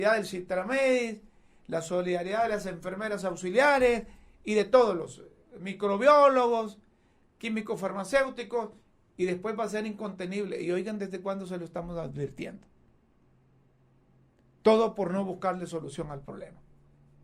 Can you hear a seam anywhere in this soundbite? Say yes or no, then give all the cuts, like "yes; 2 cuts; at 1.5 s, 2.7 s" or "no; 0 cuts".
no; 0 cuts